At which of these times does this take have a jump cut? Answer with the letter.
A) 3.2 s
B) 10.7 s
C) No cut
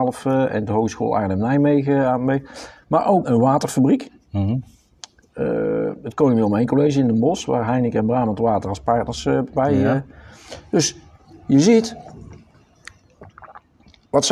A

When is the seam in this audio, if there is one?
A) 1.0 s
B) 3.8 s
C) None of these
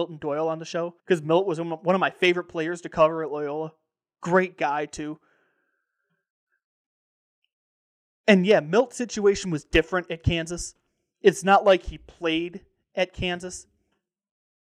A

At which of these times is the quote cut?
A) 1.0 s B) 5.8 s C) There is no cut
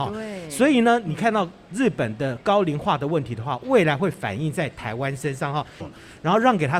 B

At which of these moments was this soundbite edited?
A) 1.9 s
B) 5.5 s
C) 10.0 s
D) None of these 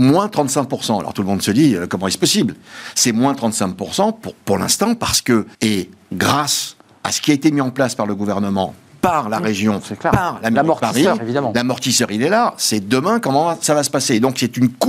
B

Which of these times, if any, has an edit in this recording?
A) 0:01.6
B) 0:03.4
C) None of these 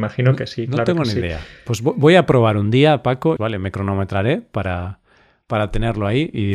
B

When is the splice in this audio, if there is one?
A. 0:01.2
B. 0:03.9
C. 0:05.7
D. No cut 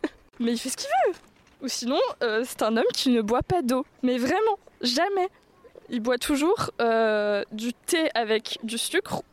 B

